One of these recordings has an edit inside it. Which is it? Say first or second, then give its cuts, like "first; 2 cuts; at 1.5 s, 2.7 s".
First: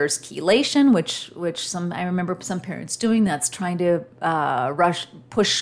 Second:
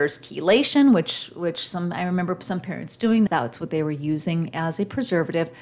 second; 1 cut; at 3.3 s